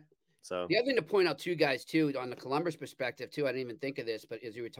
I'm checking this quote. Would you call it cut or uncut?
uncut